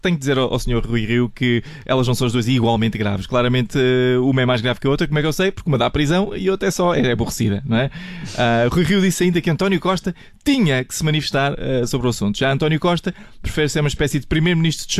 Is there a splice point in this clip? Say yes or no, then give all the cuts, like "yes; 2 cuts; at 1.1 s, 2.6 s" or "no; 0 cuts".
no; 0 cuts